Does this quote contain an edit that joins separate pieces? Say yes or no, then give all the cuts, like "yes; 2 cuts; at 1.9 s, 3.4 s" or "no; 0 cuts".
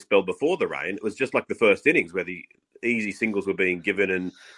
no; 0 cuts